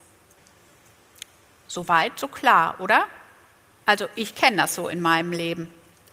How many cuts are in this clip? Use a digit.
0